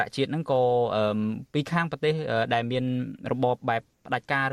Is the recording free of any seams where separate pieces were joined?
no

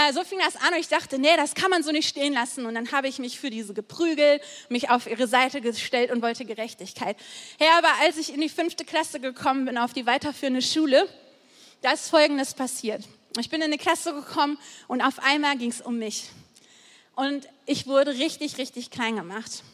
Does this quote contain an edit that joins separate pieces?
no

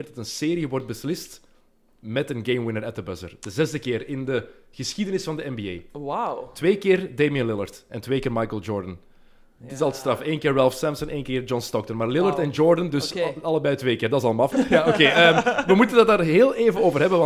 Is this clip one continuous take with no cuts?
no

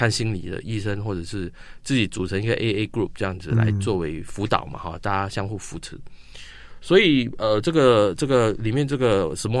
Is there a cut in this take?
no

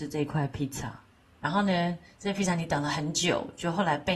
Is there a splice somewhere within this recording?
no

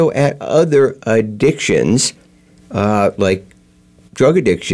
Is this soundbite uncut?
yes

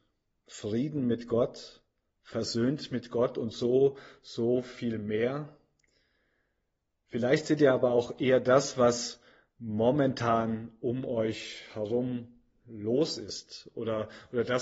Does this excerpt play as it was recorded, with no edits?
yes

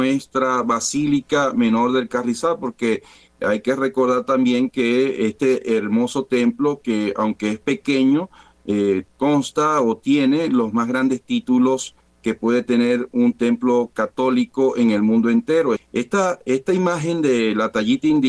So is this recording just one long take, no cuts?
no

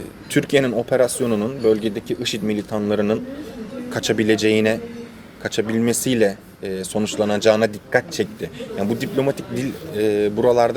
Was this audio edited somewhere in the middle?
no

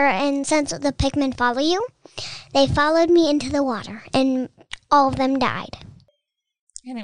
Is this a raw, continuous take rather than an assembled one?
yes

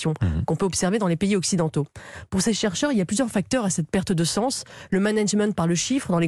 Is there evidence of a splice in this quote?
no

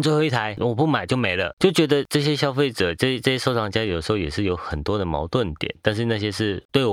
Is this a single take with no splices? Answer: yes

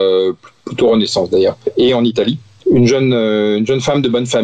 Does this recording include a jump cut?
no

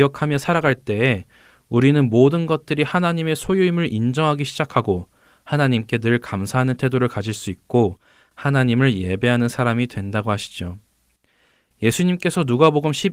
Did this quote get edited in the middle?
no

